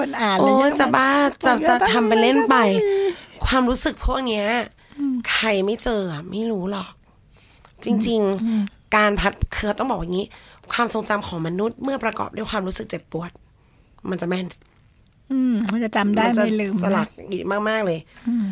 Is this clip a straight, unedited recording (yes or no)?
yes